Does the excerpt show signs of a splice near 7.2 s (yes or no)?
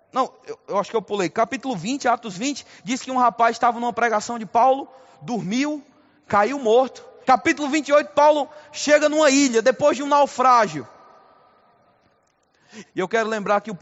yes